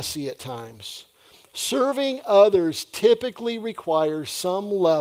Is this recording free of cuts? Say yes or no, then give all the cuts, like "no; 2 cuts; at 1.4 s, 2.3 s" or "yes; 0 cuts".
yes; 0 cuts